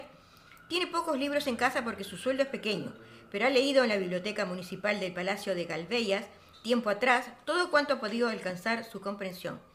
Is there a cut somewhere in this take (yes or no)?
no